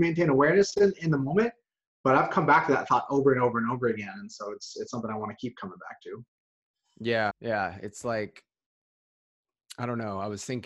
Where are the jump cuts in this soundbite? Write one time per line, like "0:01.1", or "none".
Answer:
0:07.3